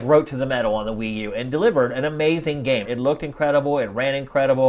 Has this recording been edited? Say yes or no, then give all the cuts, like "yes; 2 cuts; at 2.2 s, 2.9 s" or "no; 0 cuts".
yes; 1 cut; at 2.8 s